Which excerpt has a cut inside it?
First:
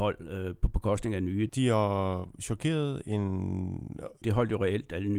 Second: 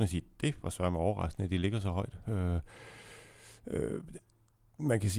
first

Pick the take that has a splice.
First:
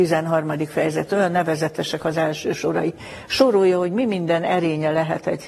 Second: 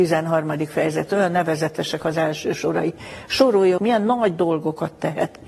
second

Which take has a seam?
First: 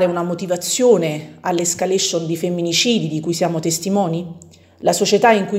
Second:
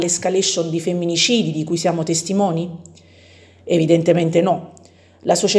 first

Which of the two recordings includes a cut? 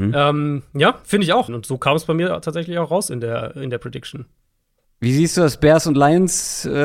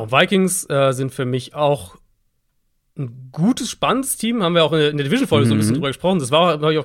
first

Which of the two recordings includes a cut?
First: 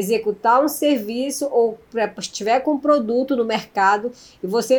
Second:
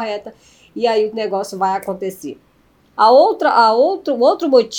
second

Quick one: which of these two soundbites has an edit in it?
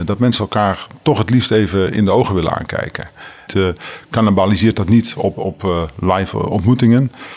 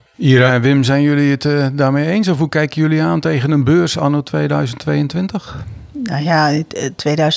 first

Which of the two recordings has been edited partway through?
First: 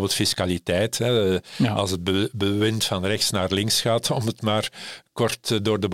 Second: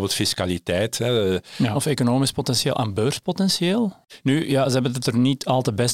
second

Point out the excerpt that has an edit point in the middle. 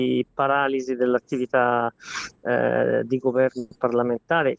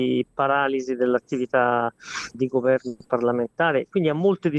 second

